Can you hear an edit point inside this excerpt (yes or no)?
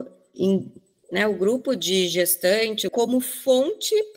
yes